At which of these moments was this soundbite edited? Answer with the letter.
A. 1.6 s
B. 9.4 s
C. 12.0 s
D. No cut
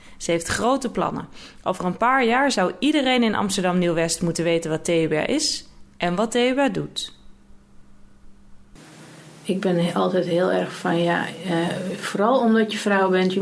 D